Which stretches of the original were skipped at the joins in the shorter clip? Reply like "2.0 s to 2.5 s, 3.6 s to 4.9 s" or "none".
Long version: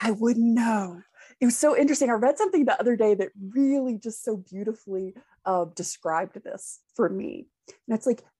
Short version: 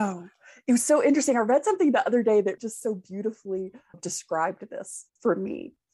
3.3 s to 4.0 s, 5.4 s to 5.7 s